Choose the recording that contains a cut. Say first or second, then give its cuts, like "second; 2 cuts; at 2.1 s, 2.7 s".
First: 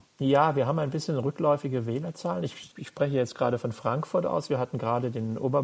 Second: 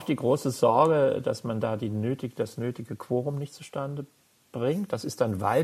first; 1 cut; at 2.7 s